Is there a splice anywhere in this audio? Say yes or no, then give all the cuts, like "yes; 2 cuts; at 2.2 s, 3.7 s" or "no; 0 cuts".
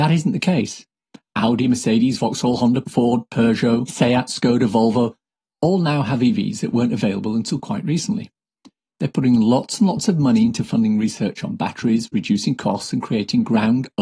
yes; 1 cut; at 3.9 s